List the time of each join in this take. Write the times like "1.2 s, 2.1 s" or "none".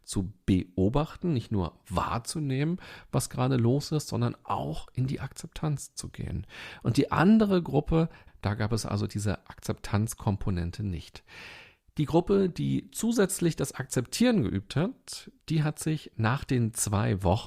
8.3 s